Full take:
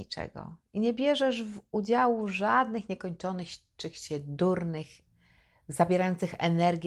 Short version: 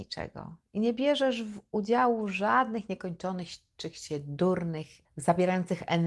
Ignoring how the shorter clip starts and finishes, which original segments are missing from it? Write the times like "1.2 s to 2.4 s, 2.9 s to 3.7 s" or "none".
5.0 s to 5.6 s